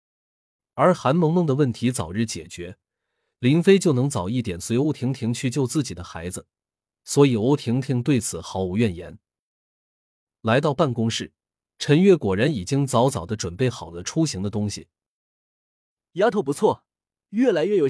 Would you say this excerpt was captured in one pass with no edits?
yes; 0 cuts

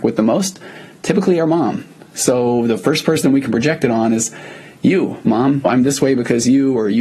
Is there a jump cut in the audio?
no; 0 cuts

